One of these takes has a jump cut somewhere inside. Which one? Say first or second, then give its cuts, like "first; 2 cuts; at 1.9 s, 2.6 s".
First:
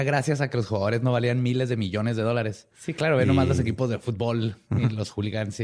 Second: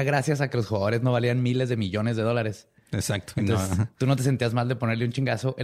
first; 1 cut; at 2.7 s